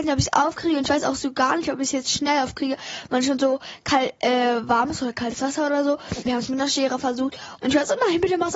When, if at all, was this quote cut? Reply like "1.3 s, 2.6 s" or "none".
6.3 s, 7.6 s